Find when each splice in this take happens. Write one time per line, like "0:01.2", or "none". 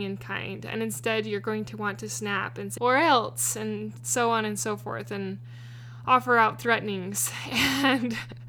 0:02.8

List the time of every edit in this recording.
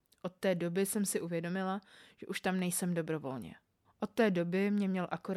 0:03.8

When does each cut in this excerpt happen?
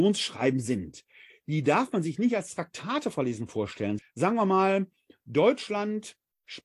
0:04.0

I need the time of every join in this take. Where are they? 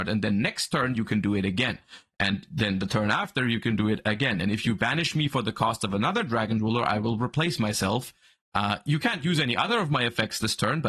none

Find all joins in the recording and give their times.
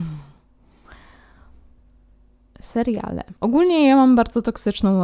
0:03.4

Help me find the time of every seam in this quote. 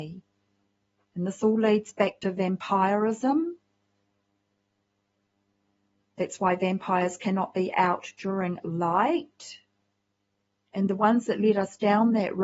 0:10.5

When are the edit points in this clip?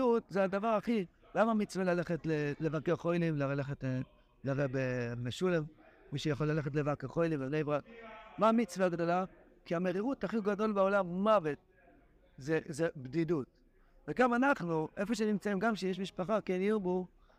none

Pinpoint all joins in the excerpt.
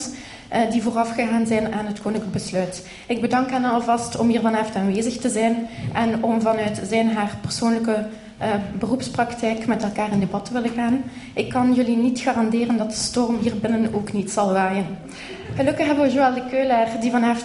none

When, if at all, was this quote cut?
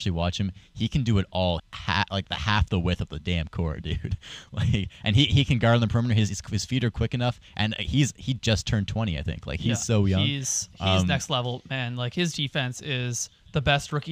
0:01.6

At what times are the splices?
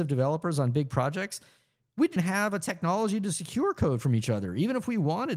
0:02.2

